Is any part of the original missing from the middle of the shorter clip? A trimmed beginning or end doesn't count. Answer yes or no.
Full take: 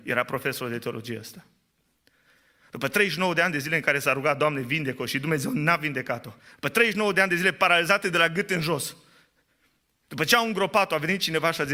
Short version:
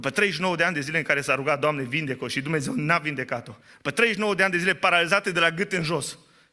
no